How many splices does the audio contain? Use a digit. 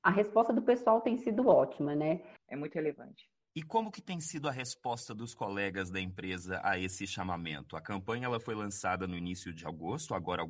1